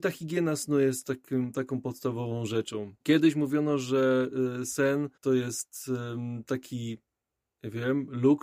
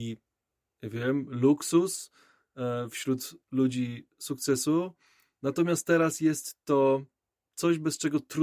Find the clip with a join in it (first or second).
first